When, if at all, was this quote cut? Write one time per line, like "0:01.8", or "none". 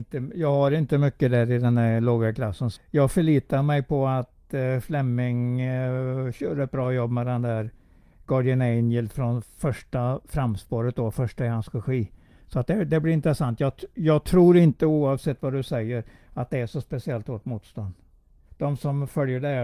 0:02.8
0:18.5